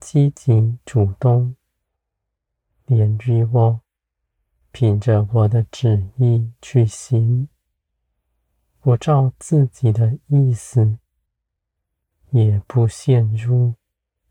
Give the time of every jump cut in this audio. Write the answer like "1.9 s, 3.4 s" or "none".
none